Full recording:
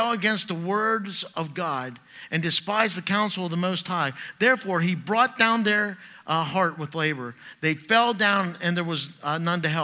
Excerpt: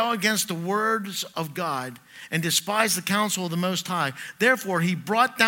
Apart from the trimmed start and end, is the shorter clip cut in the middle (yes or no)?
no